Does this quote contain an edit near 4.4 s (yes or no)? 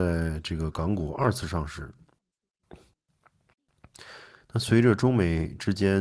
yes